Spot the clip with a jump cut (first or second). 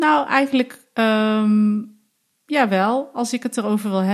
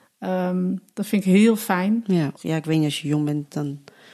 second